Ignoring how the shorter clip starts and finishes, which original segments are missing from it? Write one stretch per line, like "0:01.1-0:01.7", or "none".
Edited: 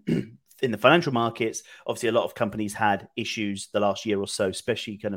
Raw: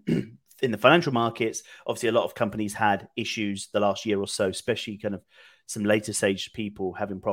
none